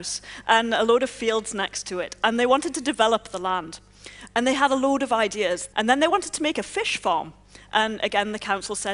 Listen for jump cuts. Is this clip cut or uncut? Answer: cut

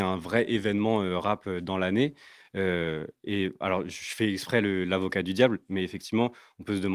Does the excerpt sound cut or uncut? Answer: uncut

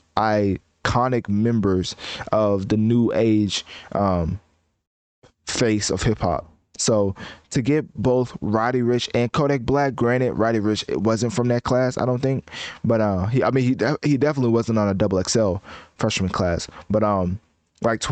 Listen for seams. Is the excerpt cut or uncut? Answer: uncut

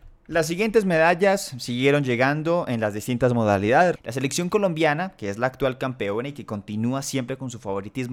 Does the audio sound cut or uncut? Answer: cut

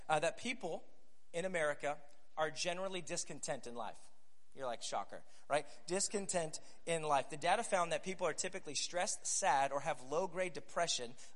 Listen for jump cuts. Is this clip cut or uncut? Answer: uncut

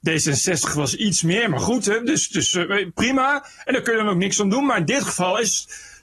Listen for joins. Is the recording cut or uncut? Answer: uncut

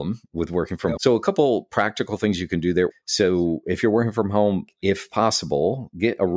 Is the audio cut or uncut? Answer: cut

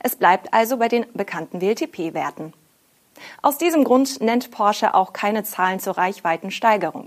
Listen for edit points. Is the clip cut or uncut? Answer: uncut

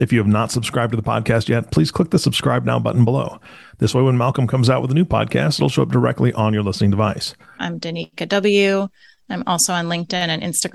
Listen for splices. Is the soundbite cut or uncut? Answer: cut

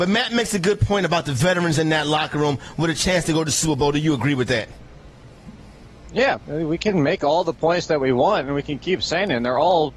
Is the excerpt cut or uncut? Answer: cut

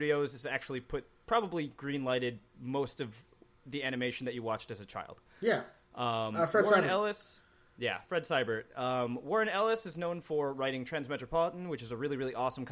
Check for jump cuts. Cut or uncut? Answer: uncut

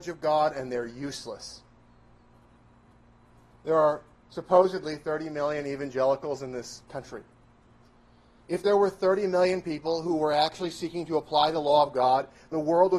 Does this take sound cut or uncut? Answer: cut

